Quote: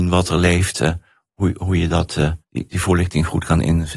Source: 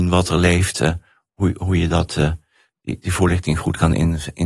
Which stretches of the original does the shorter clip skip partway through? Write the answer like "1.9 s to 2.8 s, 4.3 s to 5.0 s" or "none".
2.4 s to 2.7 s